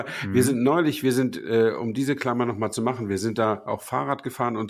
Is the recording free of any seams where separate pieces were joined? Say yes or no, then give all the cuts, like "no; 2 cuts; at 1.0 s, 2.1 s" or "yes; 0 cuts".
yes; 0 cuts